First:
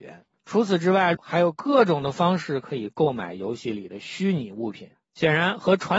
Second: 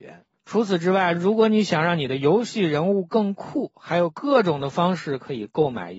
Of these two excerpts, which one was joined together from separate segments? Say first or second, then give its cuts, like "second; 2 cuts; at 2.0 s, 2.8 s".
first; 1 cut; at 1.1 s